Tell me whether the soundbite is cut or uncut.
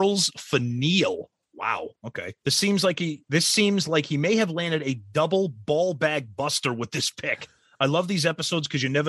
cut